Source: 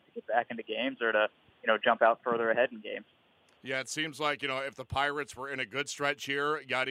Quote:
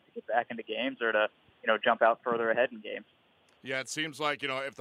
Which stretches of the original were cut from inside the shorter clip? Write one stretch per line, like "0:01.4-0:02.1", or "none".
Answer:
none